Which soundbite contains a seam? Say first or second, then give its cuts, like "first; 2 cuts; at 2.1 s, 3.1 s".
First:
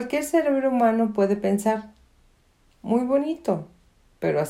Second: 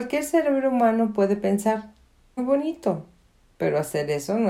second; 1 cut; at 2.4 s